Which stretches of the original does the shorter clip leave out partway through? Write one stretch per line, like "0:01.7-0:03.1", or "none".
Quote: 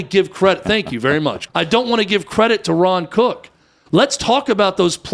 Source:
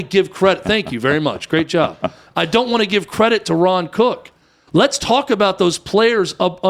0:01.5-0:02.3